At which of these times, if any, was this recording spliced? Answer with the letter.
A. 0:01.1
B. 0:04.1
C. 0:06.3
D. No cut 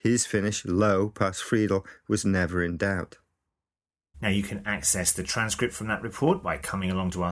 B